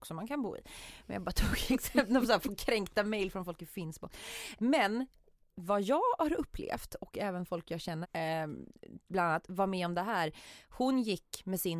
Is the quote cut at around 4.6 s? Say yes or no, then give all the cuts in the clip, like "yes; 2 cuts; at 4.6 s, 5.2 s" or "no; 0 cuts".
yes; 2 cuts; at 4.6 s, 8.0 s